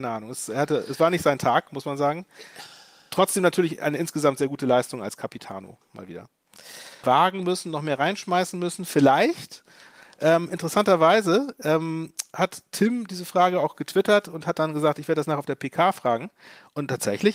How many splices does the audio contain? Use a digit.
1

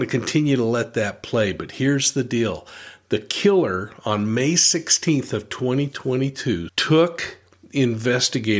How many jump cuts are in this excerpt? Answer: 1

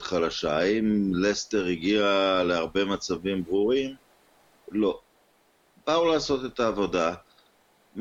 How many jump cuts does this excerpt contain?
0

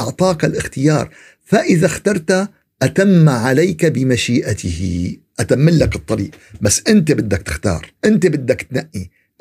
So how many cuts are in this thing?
1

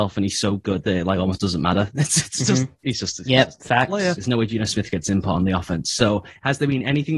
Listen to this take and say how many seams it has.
1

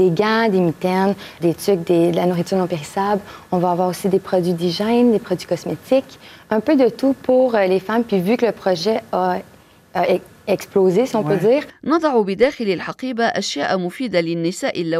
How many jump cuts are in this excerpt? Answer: 1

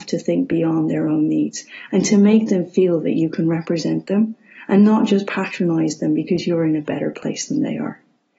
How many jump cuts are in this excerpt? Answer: 0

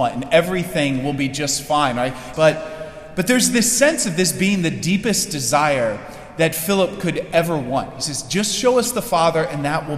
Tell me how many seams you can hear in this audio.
1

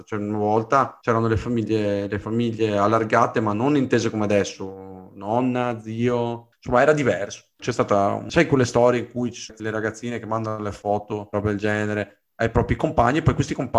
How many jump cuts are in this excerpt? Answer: 2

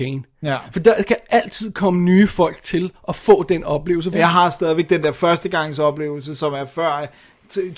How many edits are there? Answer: 1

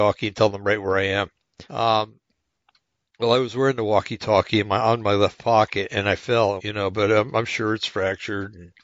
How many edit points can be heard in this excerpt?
2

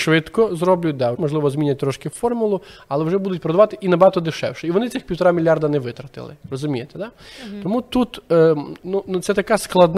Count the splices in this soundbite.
1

